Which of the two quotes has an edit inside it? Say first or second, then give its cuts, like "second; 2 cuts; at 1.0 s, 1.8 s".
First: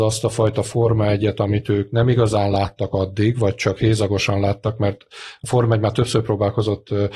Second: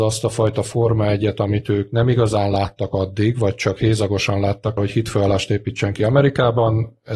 second; 1 cut; at 4.8 s